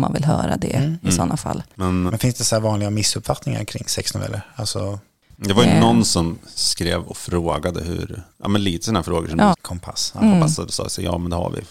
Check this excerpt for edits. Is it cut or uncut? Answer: cut